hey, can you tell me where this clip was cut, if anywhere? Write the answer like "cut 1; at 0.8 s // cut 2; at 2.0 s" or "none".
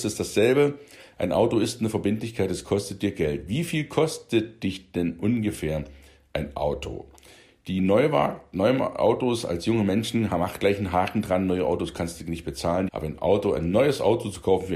cut 1; at 12.9 s